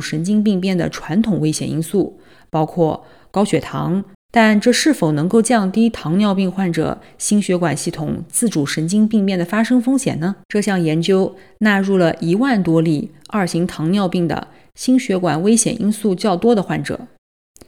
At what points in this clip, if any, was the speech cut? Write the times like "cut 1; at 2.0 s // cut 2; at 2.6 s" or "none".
cut 1; at 4.1 s // cut 2; at 10.4 s